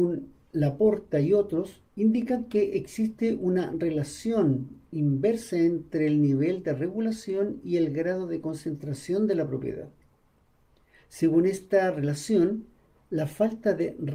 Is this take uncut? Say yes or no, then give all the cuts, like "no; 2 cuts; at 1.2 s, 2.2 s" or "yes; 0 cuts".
no; 1 cut; at 1.9 s